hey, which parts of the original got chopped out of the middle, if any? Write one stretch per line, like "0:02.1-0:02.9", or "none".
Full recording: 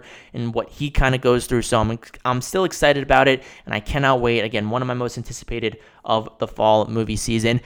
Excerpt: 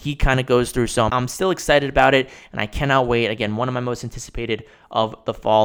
0:01.8-0:02.2